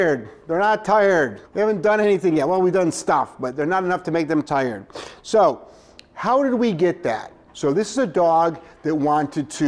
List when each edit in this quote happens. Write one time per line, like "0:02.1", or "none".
0:01.4
0:07.5